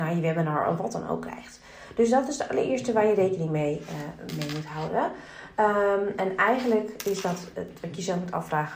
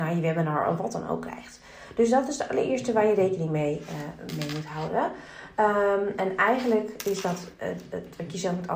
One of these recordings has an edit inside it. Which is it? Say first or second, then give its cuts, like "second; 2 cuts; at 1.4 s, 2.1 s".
first; 1 cut; at 7.5 s